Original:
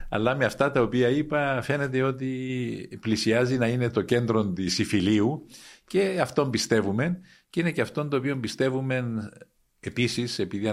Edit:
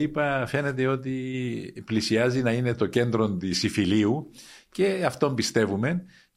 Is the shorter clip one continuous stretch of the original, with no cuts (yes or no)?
yes